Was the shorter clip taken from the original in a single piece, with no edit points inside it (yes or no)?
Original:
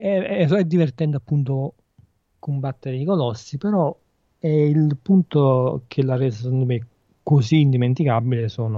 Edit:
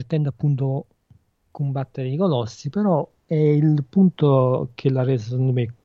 no